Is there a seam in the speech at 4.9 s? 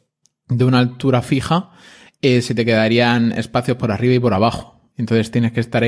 yes; 1 cut; at 4.9 s

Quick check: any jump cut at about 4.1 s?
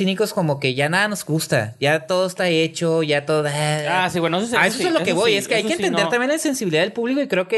no; 0 cuts

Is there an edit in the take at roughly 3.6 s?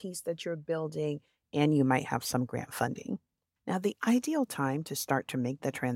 yes; 1 cut; at 3.6 s

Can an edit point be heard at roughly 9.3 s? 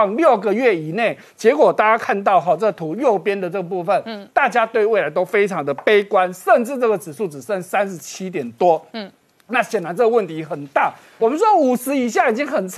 no; 1 cut; at 11.2 s

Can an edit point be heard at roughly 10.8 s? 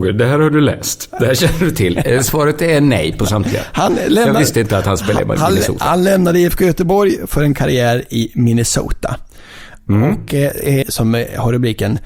yes; 1 cut; at 10.8 s

